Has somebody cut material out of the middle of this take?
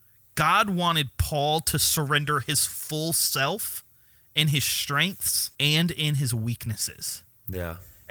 yes; 1 cut; at 5.5 s

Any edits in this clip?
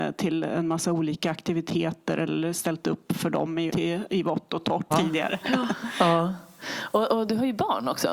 yes; 2 cuts; at 3.7 s, 4.9 s

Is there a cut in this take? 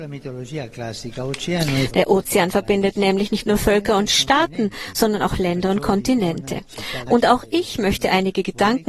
yes; 2 cuts; at 1.9 s, 7.1 s

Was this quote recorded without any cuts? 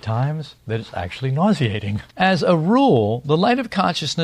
no; 1 cut; at 2.1 s

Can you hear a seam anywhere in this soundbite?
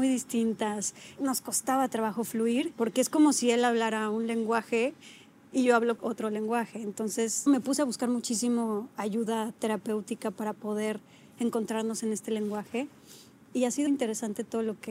yes; 1 cut; at 13.9 s

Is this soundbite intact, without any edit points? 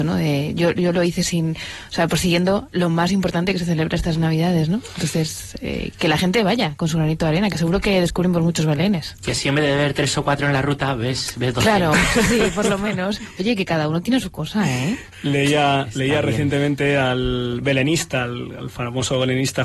yes; 0 cuts

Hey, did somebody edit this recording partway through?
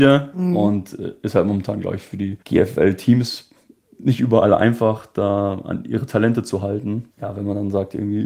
yes; 2 cuts; at 2.4 s, 7.1 s

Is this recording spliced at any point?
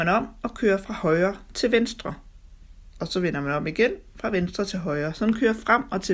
no; 0 cuts

